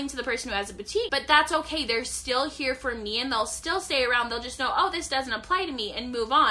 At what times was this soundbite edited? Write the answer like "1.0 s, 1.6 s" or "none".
1.1 s